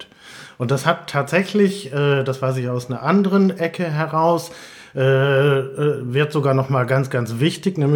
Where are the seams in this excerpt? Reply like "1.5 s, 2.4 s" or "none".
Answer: none